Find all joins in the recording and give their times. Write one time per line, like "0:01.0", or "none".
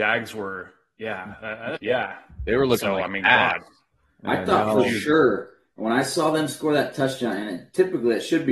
0:01.8